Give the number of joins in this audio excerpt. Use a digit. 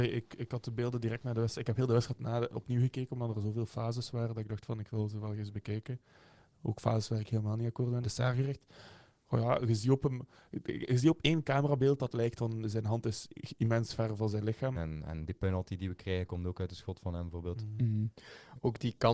2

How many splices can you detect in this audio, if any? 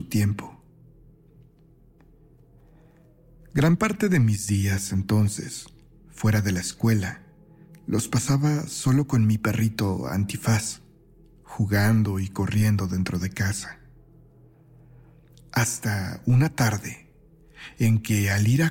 0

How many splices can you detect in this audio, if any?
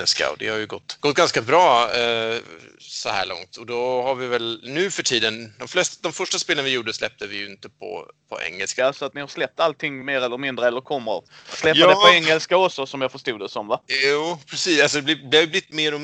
1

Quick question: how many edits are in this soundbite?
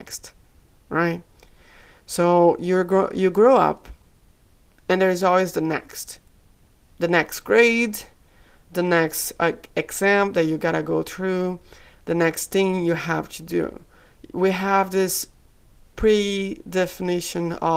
0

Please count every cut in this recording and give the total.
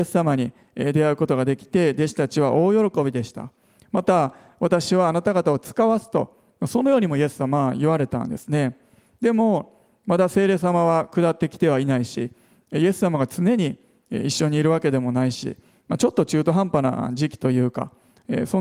0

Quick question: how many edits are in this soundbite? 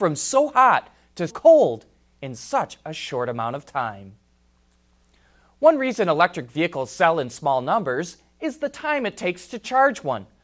1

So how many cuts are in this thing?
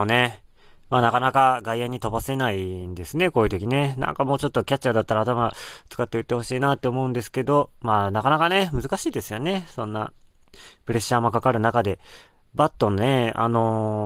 0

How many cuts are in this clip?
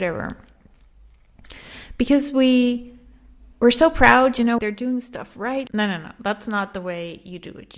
2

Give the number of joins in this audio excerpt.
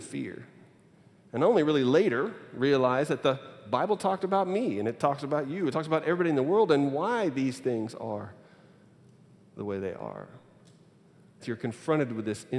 1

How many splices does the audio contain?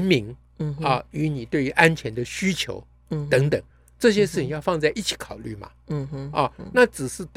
0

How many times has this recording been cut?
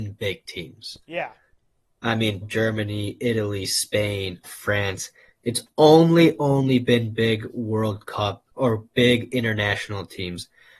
3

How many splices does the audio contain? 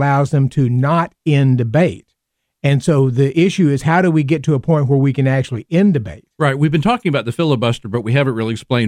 0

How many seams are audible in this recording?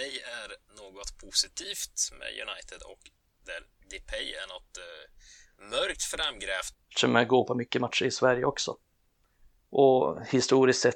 1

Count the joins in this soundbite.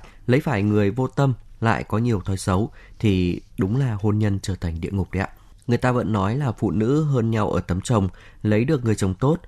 1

